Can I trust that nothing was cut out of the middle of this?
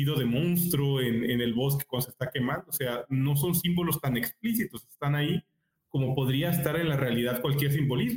yes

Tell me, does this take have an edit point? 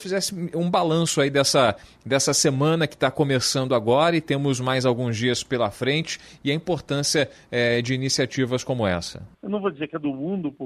yes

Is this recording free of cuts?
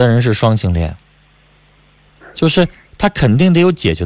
yes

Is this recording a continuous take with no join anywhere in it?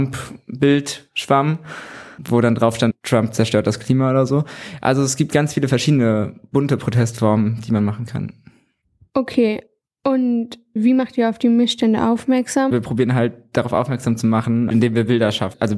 yes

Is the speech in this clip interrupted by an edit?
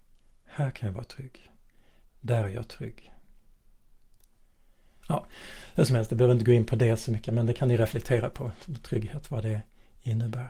yes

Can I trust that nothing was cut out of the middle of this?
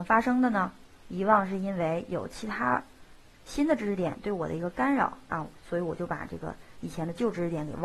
no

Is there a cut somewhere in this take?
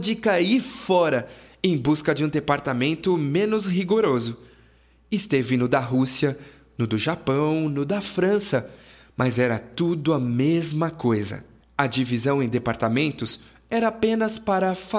yes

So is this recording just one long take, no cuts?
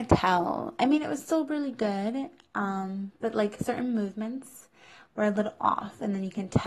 yes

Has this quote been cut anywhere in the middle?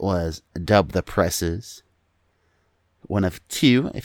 no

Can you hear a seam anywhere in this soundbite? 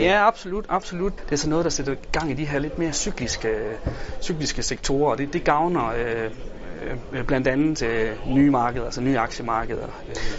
yes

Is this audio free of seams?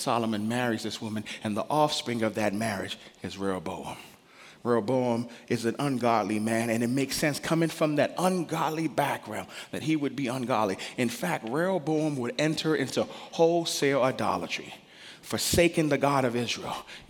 yes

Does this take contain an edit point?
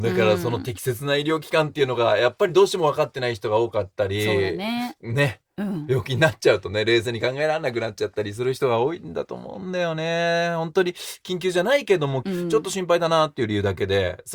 yes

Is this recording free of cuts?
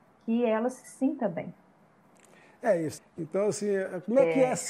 no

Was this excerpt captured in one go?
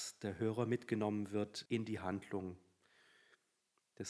no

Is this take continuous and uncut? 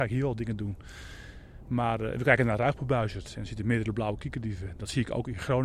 yes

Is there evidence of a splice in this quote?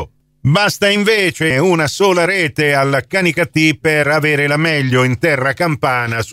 yes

